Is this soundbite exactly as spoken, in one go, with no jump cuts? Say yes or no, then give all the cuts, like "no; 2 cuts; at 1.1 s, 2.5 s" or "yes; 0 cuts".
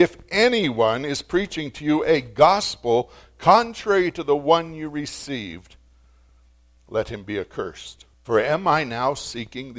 no; 1 cut; at 8.1 s